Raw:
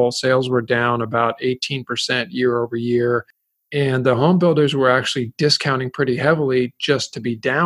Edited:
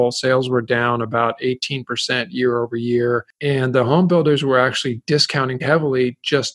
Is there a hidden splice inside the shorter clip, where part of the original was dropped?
yes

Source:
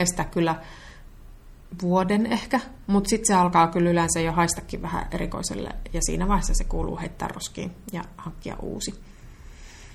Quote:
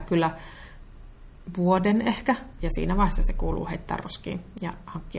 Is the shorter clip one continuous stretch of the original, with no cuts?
no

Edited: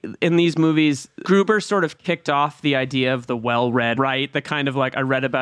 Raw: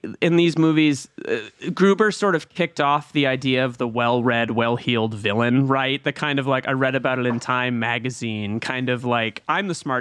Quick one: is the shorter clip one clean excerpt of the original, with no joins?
no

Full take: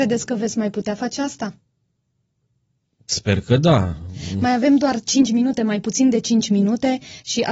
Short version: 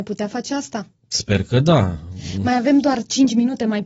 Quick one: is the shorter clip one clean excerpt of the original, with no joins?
no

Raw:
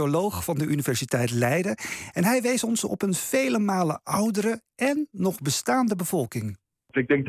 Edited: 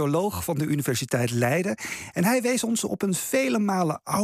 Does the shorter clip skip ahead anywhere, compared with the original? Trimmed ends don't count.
no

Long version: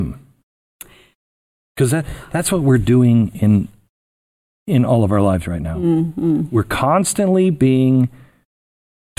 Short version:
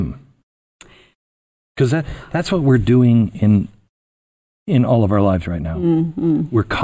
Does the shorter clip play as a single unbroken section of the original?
yes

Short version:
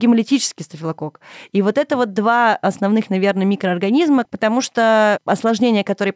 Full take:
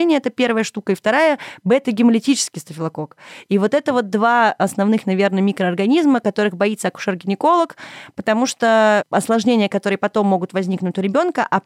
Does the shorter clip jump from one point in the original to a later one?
yes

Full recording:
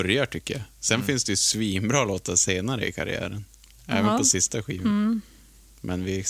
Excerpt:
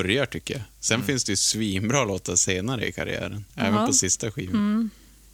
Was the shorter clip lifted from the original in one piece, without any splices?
no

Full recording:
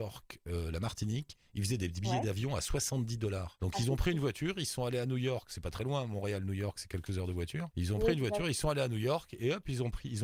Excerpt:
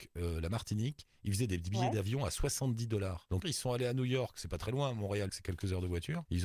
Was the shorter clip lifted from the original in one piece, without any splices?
no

